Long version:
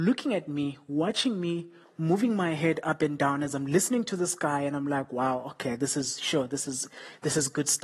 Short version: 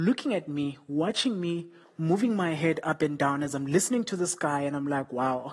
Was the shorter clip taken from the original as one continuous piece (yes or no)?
yes